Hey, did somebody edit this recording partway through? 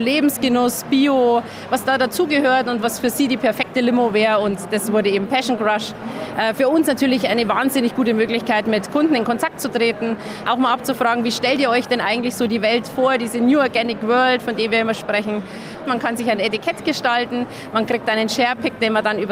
yes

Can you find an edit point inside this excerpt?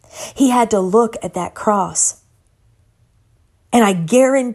no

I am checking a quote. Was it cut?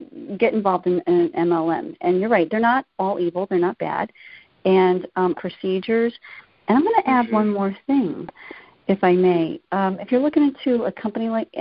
yes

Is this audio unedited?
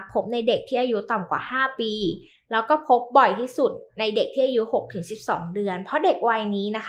yes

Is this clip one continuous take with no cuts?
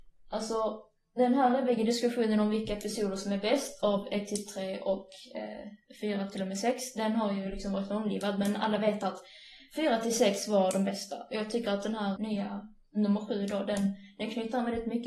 no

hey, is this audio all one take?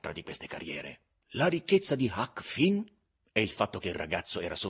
no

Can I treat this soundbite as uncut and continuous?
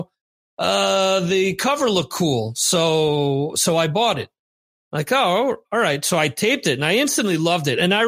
yes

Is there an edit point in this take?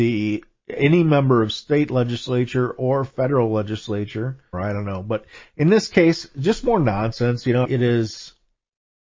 yes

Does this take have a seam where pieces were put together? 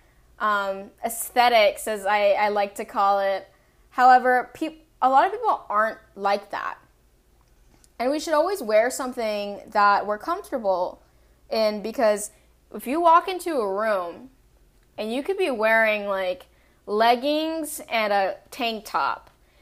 no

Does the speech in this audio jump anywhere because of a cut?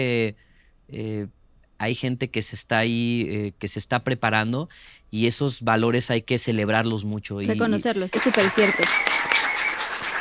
yes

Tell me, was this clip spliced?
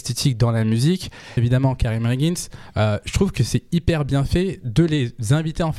yes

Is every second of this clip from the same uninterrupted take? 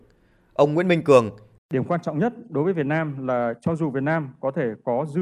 no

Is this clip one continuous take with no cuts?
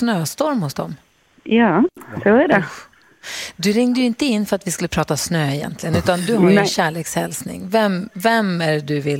yes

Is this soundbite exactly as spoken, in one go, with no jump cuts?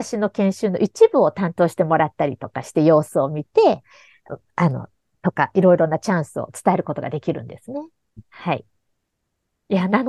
yes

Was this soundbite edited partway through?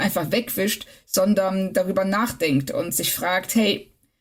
no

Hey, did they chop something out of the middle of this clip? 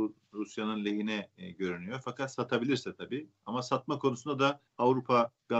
yes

